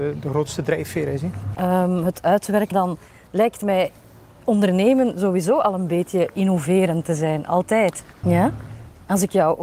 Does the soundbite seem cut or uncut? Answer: cut